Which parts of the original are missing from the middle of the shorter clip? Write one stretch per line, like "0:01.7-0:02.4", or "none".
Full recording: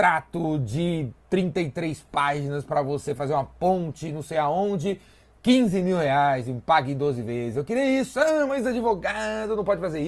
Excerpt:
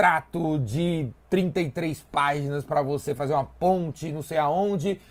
none